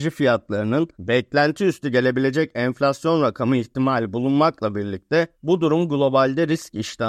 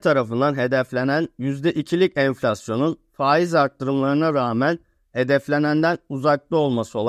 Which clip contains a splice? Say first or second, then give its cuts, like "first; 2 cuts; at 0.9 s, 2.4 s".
first; 2 cuts; at 0.9 s, 5.3 s